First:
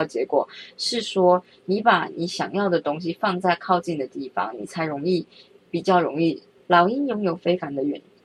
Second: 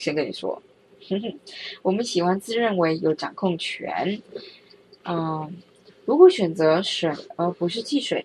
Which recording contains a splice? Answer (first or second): first